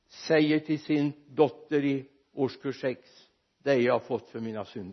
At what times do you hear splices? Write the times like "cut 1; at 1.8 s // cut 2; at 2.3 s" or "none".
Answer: none